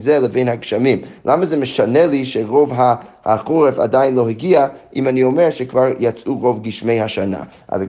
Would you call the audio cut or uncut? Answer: uncut